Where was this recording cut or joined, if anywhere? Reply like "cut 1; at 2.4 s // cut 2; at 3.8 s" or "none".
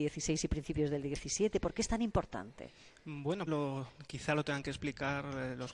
cut 1; at 3.5 s